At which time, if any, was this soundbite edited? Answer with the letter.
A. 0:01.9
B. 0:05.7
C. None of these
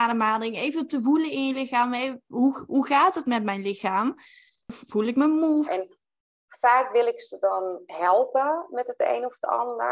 B